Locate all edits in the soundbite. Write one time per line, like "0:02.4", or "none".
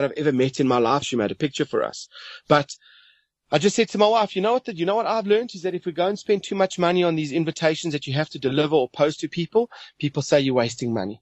0:01.0